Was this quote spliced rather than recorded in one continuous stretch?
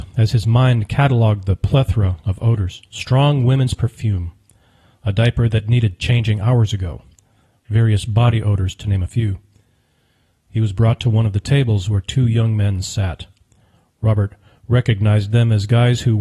yes; 1 cut; at 2.9 s

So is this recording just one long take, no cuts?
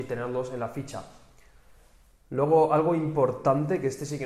yes; 0 cuts

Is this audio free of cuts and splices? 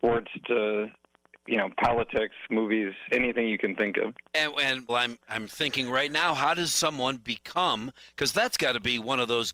no; 2 cuts; at 2.5 s, 4.9 s

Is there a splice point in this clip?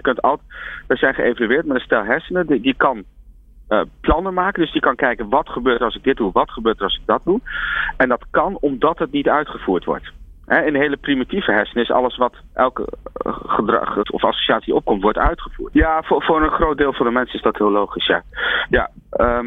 yes; 2 cuts; at 14.0 s, 15.7 s

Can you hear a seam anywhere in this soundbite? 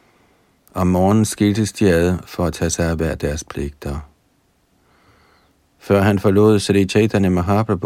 no; 0 cuts

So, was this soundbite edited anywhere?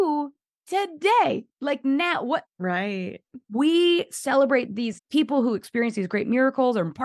yes; 2 cuts; at 2.5 s, 5.0 s

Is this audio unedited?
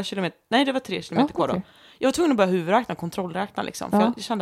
yes; 0 cuts

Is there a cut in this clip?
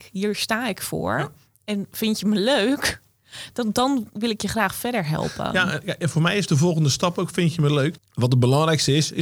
yes; 1 cut; at 8.0 s

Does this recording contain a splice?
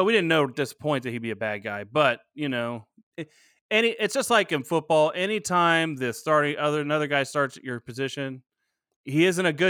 no; 0 cuts

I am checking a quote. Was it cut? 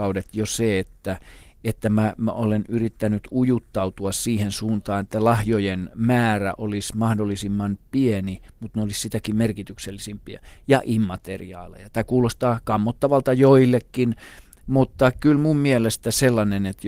no; 0 cuts

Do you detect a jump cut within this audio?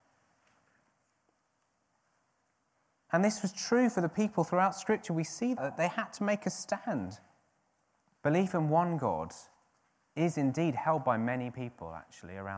yes; 2 cuts; at 5.6 s, 8.1 s

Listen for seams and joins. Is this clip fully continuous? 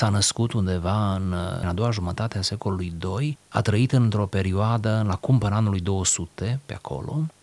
no; 1 cut; at 1.6 s

